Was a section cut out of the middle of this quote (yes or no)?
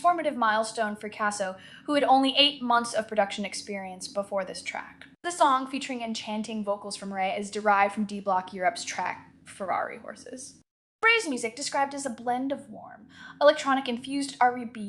yes